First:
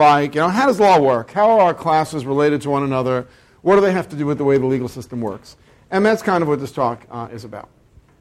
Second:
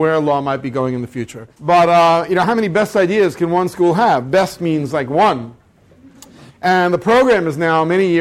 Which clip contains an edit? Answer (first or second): second